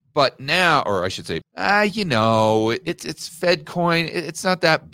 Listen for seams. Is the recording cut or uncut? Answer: cut